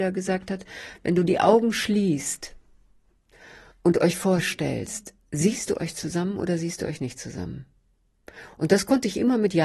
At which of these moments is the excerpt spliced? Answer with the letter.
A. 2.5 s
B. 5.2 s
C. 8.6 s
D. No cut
B